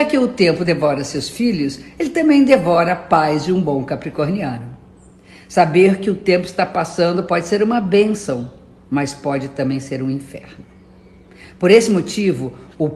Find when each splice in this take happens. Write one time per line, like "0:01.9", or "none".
none